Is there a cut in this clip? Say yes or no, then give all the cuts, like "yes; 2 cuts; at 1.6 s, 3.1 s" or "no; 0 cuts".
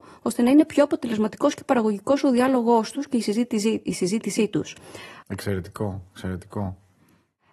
yes; 1 cut; at 5.2 s